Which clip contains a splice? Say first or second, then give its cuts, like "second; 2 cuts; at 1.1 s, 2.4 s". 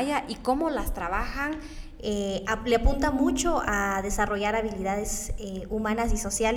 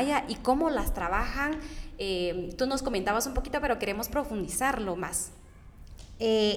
first; 1 cut; at 2.0 s